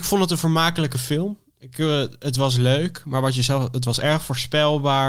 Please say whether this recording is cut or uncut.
uncut